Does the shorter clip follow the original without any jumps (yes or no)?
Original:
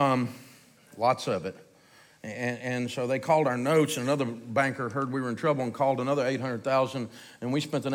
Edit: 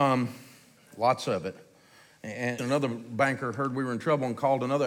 no